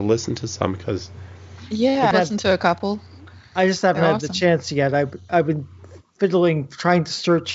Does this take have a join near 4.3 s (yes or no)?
no